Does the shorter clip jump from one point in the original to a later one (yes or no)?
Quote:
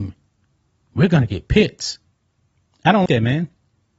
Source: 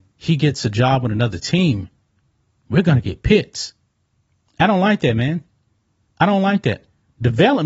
yes